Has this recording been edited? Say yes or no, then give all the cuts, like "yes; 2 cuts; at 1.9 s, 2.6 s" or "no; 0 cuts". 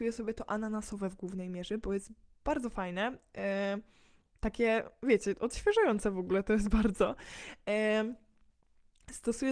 no; 0 cuts